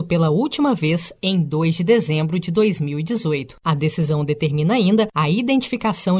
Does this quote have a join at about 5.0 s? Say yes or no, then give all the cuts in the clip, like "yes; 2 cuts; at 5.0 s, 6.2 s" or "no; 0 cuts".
no; 1 cut; at 3.6 s